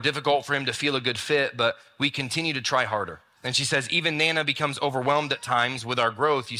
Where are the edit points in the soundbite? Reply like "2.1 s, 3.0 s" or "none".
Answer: 3.4 s